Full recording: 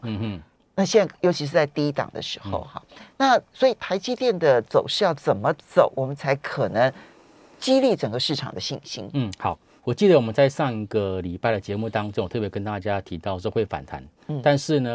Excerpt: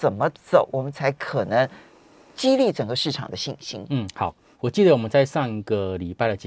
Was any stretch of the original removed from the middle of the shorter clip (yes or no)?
no